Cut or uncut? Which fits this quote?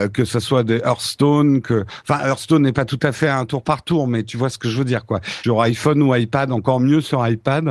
cut